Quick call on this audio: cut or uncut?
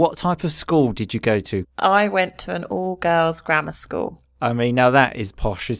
cut